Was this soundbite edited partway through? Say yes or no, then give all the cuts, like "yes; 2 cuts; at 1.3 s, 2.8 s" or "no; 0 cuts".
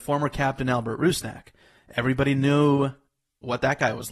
no; 0 cuts